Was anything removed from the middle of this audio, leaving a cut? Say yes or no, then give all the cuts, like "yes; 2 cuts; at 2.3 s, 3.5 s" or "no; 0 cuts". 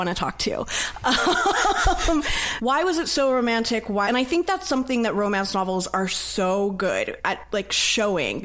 yes; 1 cut; at 4.0 s